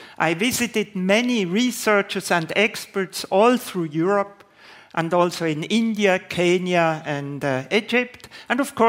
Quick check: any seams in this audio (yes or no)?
no